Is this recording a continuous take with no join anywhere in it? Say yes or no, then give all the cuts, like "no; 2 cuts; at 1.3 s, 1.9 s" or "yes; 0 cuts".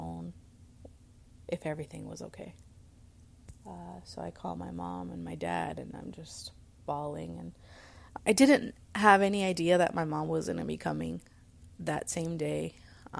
no; 1 cut; at 8.2 s